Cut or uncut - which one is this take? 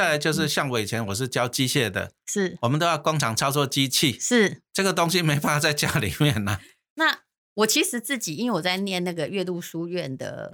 uncut